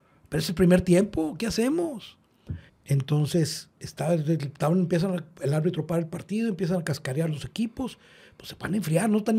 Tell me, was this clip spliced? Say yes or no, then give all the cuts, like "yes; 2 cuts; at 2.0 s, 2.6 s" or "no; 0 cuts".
yes; 2 cuts; at 2.7 s, 3.7 s